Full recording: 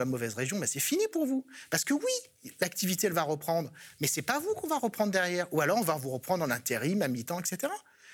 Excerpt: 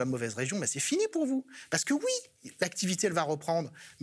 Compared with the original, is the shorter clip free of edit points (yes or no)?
yes